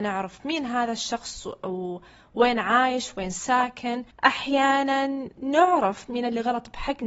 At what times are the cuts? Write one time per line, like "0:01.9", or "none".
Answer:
0:04.1